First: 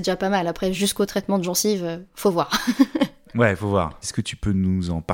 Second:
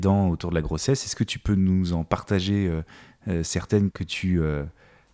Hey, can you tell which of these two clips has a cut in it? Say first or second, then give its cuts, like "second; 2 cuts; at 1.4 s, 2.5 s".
first; 1 cut; at 4.0 s